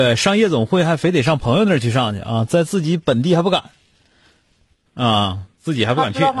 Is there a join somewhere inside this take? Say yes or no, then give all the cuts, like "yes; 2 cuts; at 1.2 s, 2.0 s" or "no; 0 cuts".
yes; 1 cut; at 4.9 s